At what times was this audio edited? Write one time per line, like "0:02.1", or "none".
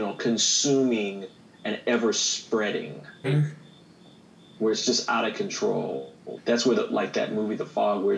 0:03.2
0:06.4